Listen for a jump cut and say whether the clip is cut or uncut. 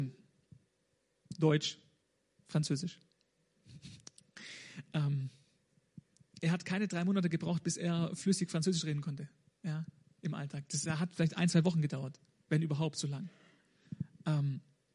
uncut